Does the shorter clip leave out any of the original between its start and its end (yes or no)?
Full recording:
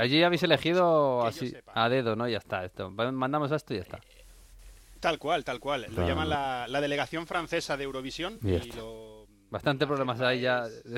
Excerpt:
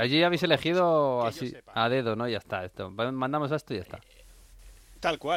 no